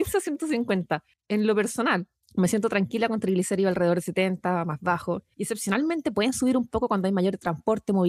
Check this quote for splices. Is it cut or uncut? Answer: uncut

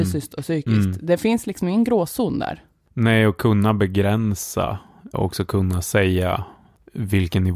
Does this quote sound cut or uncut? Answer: cut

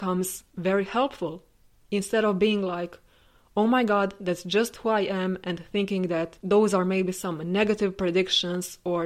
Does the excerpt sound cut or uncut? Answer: uncut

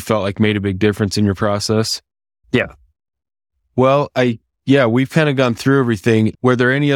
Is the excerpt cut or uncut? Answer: cut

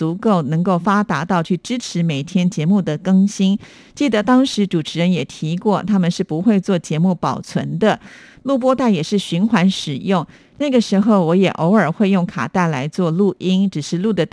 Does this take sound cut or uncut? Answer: uncut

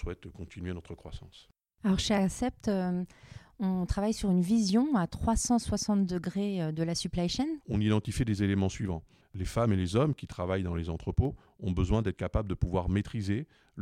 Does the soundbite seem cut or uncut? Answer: cut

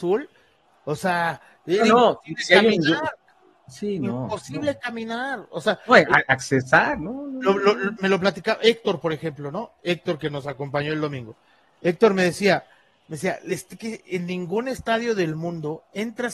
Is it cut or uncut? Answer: uncut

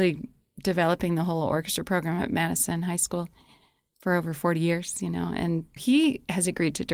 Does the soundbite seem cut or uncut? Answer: cut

